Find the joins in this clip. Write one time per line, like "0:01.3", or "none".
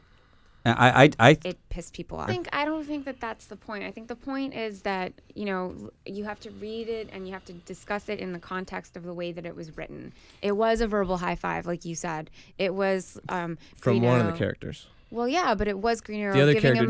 0:02.3